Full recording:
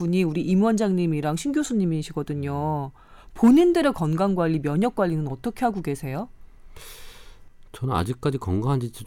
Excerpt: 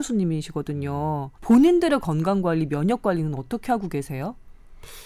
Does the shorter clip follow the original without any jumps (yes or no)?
no